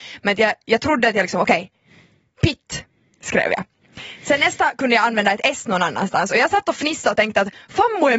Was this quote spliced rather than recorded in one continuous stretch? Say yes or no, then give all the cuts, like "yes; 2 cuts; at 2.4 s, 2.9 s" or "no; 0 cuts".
no; 0 cuts